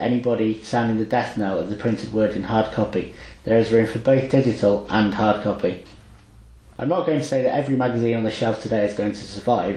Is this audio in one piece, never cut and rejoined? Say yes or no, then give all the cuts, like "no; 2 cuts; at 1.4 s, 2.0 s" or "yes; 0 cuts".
yes; 0 cuts